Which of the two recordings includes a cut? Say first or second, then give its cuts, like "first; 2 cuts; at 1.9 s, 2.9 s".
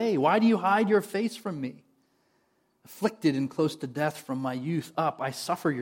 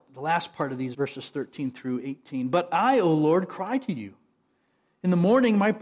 second; 1 cut; at 0.9 s